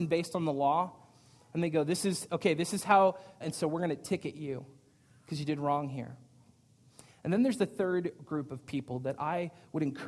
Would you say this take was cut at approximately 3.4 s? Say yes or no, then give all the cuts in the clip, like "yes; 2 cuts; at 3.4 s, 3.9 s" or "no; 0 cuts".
yes; 1 cut; at 3.4 s